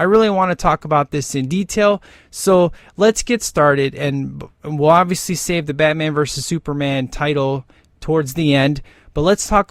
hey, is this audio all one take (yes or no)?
yes